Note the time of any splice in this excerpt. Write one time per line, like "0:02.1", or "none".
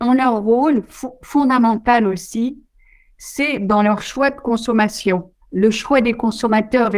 0:05.4